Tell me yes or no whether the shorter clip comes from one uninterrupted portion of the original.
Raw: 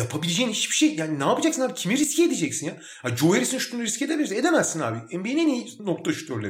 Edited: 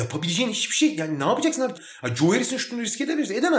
no